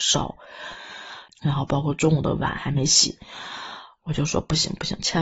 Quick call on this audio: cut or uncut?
cut